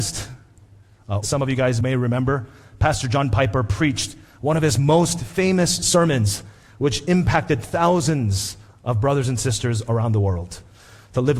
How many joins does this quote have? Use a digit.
1